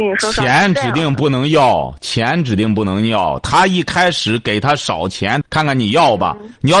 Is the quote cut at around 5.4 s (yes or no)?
yes